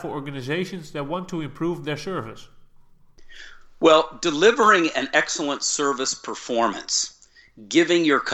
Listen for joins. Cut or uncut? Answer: uncut